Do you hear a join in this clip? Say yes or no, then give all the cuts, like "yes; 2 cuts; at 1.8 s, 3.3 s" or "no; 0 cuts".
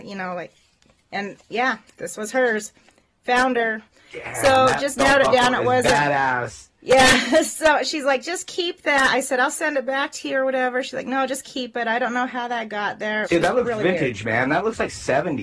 yes; 1 cut; at 13.2 s